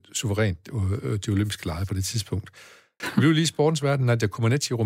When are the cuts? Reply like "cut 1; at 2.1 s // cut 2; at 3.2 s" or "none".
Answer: cut 1; at 3.0 s